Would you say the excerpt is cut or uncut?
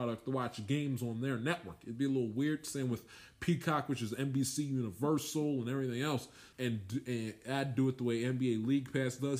cut